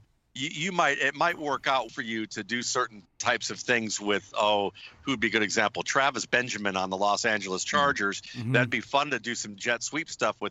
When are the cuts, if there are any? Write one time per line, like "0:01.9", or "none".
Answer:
0:01.9